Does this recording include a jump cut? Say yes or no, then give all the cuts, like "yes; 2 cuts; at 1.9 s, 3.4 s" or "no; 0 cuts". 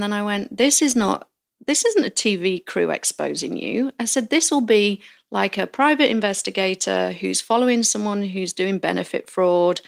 no; 0 cuts